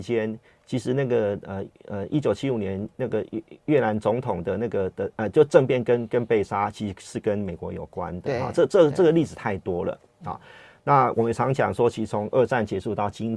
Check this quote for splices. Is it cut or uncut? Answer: uncut